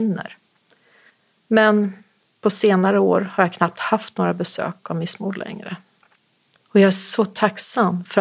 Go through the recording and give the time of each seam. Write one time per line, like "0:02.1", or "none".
0:06.6